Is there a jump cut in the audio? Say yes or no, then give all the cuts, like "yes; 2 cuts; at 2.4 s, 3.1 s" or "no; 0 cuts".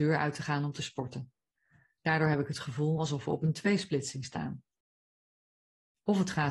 no; 0 cuts